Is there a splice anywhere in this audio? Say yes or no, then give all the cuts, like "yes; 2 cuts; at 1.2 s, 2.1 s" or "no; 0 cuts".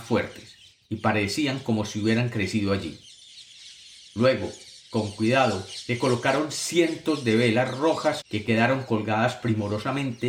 yes; 1 cut; at 8.2 s